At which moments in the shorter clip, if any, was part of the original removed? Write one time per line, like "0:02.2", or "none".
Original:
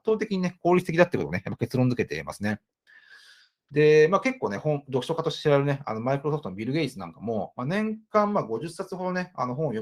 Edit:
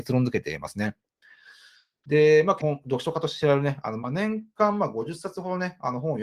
0:02.6
0:04.0

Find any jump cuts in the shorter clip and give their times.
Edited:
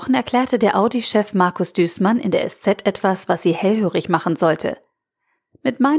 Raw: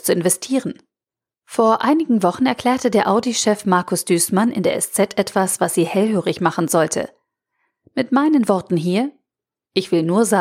none

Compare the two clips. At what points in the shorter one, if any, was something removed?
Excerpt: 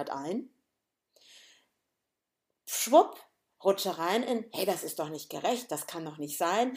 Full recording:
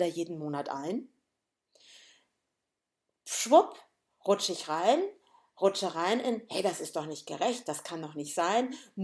0:03.5

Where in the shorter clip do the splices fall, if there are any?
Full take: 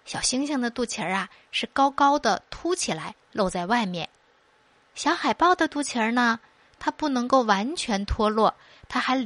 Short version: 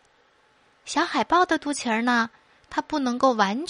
none

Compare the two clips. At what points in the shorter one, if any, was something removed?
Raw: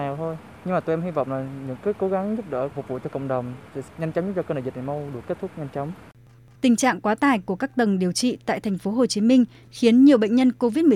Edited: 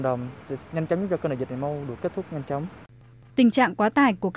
none

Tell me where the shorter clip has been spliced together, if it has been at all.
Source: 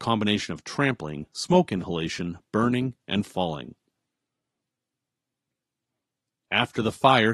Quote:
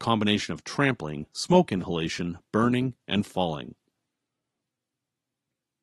none

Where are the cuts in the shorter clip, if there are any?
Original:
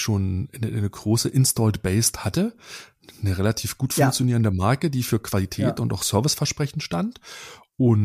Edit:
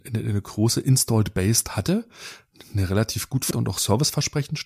0:03.5

